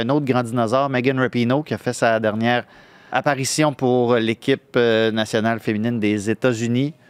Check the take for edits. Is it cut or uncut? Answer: cut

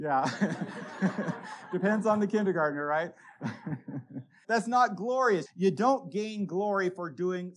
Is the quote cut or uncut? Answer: cut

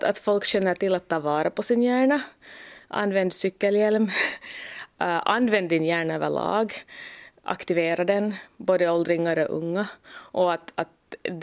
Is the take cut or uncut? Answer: uncut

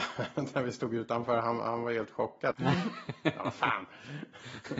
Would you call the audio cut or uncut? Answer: cut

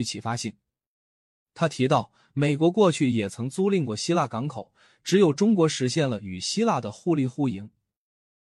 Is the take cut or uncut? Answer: uncut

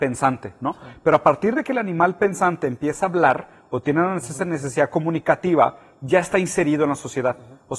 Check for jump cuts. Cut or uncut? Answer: uncut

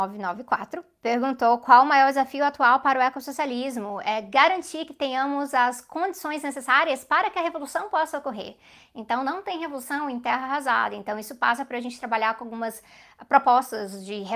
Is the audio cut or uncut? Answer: uncut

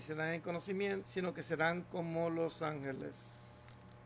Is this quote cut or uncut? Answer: cut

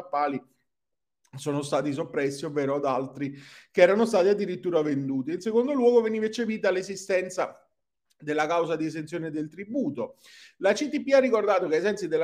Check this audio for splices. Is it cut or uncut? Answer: uncut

